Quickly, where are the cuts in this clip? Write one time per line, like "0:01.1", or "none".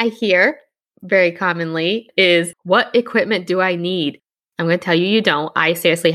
0:02.1
0:04.4